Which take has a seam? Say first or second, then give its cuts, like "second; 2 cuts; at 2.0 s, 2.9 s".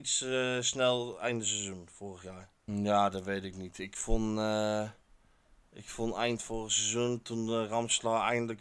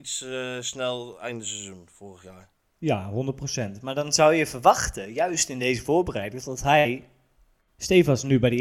first; 1 cut; at 2.7 s